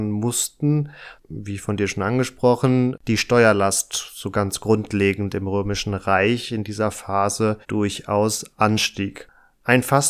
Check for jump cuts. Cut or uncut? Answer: cut